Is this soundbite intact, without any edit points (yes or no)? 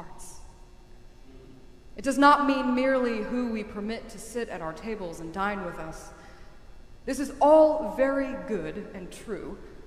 no